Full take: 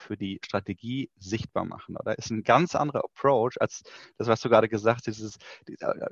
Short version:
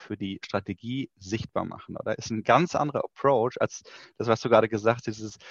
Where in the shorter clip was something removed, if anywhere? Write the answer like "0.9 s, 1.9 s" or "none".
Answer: none